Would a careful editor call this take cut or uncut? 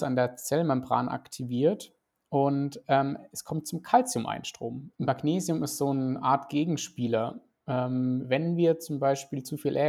cut